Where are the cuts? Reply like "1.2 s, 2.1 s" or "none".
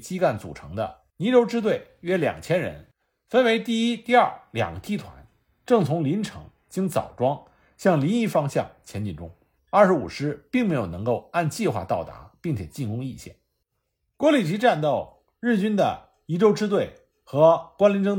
9.6 s